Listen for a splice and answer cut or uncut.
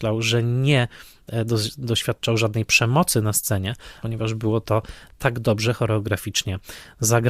cut